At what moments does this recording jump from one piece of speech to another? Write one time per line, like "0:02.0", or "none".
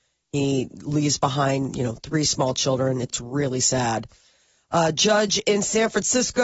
none